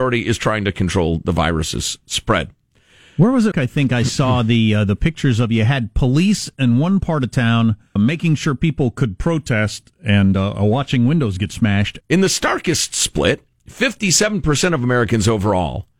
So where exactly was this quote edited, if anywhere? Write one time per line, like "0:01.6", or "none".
0:03.5
0:08.0
0:12.0